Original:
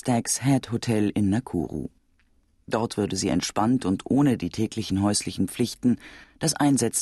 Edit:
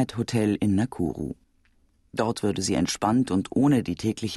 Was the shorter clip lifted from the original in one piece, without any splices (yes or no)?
yes